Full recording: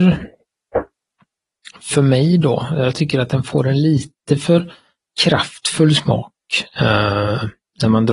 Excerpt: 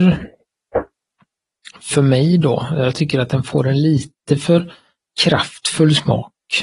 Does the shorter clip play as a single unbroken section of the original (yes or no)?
yes